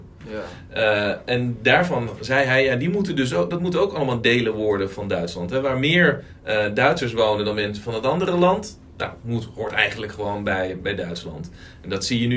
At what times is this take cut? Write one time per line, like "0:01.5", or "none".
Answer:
0:10.8